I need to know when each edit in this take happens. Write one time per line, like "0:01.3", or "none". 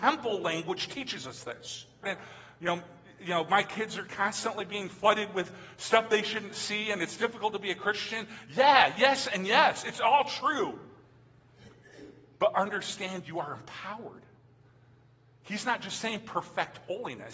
0:02.0